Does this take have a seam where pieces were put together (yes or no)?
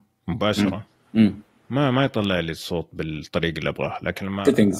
no